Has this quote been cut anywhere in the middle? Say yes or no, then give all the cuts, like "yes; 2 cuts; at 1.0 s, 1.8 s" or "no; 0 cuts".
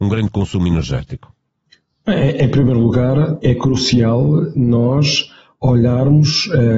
yes; 1 cut; at 3.4 s